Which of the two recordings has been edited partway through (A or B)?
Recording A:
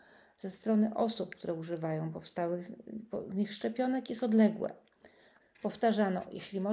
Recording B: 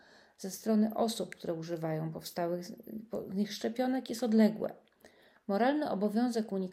A